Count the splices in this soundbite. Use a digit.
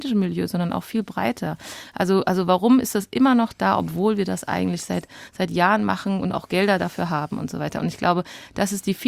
0